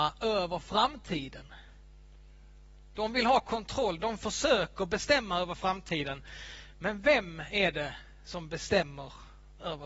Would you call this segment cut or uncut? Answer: cut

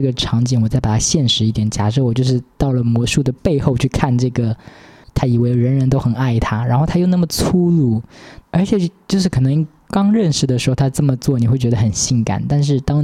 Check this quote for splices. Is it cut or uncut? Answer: cut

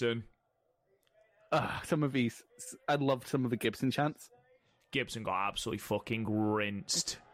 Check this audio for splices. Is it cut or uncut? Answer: uncut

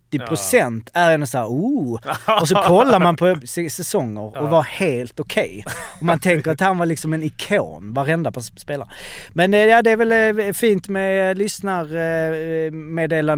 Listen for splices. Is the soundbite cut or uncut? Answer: cut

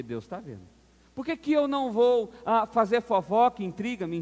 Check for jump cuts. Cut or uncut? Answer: uncut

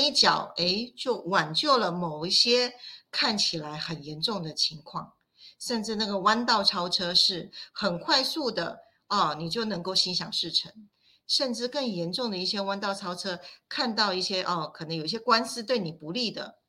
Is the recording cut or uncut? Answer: uncut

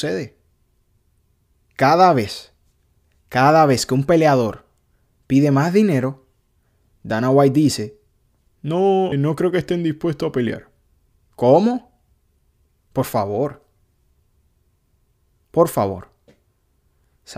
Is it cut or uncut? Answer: cut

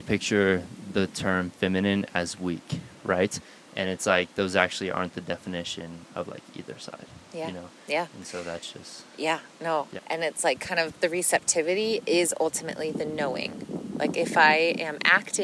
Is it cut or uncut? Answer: cut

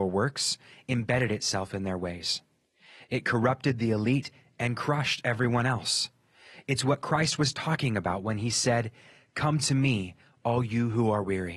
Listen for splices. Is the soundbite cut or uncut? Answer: uncut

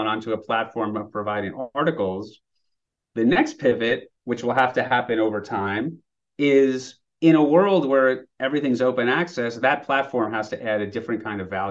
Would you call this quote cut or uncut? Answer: uncut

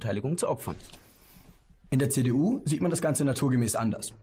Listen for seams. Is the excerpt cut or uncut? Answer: uncut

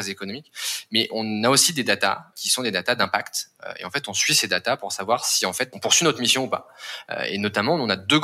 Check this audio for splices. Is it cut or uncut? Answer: uncut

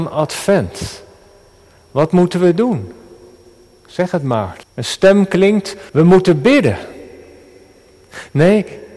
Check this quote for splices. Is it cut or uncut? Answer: cut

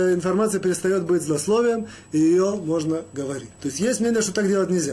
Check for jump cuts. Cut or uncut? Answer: cut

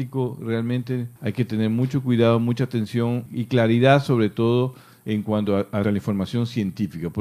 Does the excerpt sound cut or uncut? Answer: cut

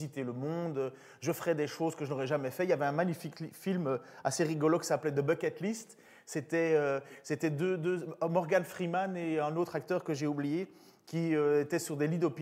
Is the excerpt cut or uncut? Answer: uncut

